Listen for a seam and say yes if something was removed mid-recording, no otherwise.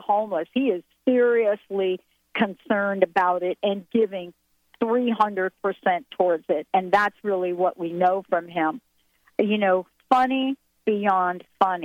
no